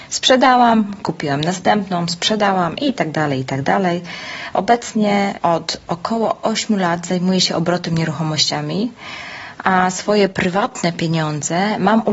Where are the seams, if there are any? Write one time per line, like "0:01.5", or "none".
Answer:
none